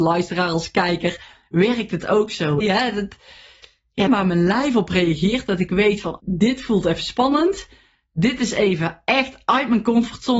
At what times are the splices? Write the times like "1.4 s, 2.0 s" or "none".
2.6 s, 4.1 s, 6.2 s